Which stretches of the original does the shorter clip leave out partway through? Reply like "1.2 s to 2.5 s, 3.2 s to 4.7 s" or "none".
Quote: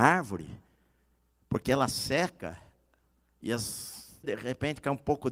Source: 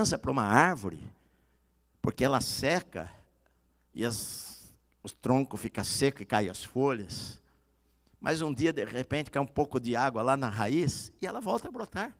4.8 s to 8.7 s